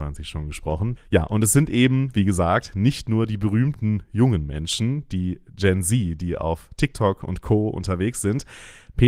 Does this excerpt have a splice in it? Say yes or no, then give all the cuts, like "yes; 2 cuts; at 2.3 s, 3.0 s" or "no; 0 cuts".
yes; 1 cut; at 1.0 s